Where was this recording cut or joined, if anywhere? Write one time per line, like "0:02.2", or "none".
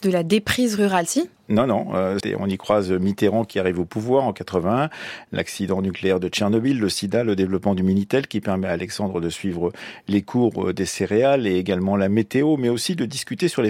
0:02.2